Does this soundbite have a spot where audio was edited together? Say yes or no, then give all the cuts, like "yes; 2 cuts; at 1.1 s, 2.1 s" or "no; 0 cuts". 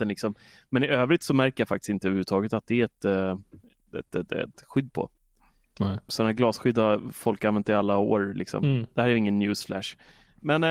yes; 1 cut; at 6.1 s